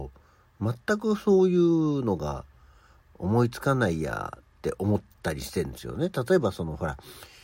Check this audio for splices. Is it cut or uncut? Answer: uncut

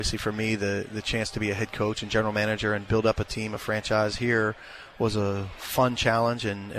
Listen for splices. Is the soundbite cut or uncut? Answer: uncut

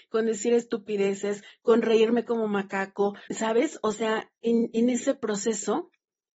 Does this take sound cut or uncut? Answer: cut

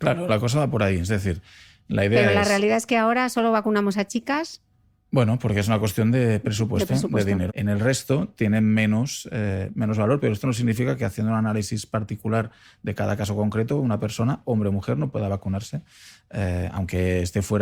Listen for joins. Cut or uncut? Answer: cut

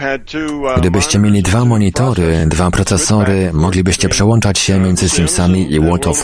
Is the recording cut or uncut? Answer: uncut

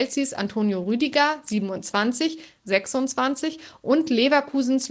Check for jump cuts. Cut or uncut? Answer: cut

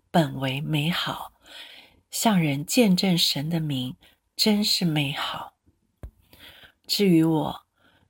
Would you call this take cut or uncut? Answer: uncut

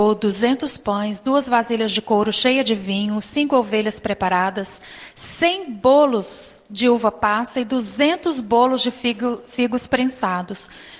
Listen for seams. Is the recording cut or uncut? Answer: cut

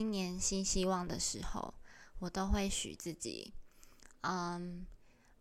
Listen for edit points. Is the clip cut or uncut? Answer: uncut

